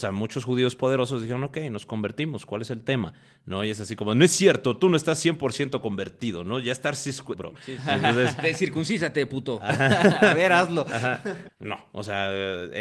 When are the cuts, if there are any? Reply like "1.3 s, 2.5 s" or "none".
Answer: 7.3 s, 11.5 s